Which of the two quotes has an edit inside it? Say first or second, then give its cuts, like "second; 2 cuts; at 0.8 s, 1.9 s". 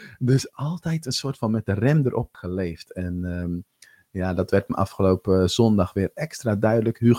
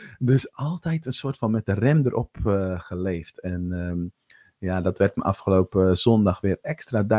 first; 1 cut; at 2.3 s